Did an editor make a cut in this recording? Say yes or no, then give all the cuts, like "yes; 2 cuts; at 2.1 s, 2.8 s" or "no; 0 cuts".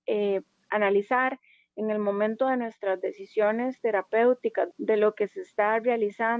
yes; 1 cut; at 4.7 s